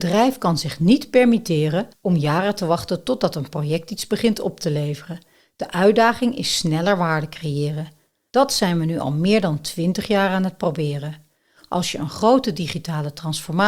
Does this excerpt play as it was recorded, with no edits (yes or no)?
no